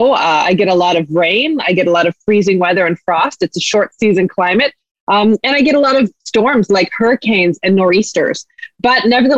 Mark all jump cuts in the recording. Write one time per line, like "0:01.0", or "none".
none